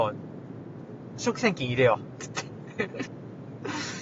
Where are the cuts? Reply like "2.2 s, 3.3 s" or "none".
3.1 s